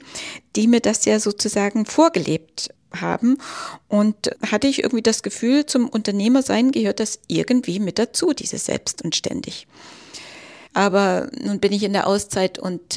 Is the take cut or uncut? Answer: cut